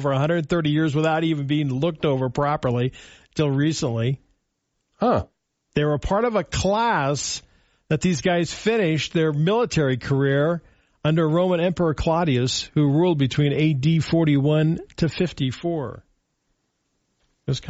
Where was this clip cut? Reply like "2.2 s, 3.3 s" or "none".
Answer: 4.7 s